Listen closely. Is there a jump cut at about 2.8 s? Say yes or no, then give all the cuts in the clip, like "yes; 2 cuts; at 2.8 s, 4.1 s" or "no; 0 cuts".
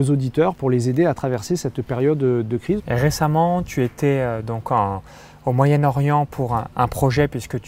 yes; 1 cut; at 2.8 s